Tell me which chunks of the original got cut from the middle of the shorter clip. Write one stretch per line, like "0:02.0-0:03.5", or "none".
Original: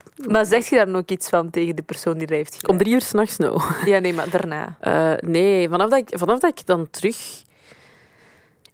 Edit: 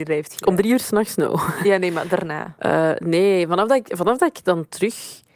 none

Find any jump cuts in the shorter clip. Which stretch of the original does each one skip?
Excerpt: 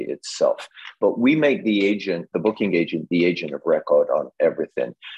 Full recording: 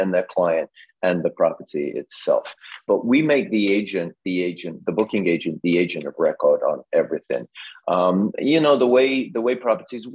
0:04.2-0:04.8

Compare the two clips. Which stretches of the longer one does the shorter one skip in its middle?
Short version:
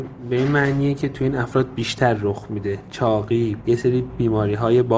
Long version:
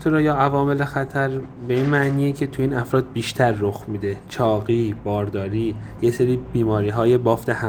0:05.0-0:06.0

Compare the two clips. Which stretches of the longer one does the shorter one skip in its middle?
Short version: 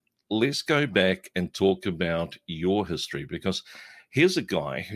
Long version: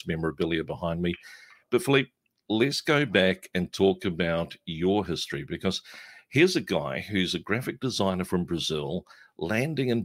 none

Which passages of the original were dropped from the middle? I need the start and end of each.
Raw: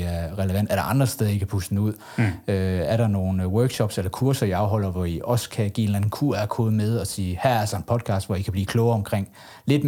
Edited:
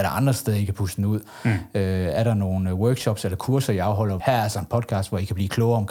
0:04.9-0:07.4

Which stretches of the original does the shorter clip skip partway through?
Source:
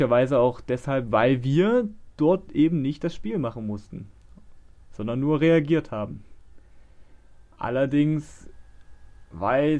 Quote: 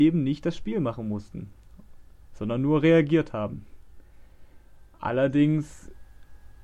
none

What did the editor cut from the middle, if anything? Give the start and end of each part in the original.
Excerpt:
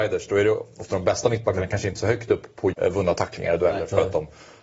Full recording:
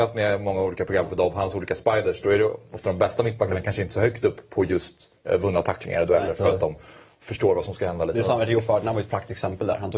0:04.7-0:05.2

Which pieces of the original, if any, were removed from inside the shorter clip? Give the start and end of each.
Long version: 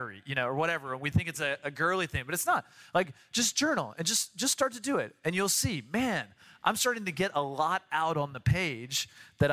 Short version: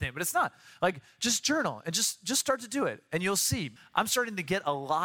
0:05.9-0:06.4

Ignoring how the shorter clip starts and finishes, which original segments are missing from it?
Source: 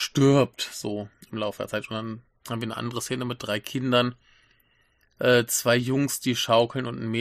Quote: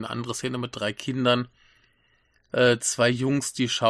none

